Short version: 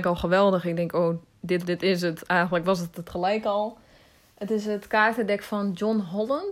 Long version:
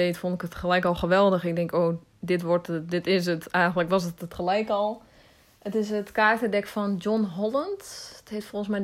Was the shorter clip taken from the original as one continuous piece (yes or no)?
no